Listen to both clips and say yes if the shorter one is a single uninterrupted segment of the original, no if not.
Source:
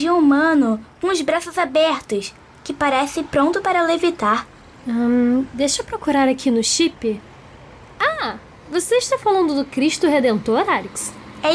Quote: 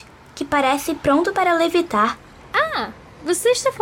no